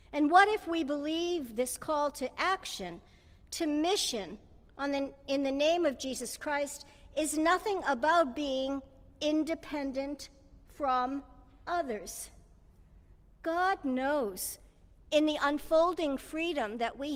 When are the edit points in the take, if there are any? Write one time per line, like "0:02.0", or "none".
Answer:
none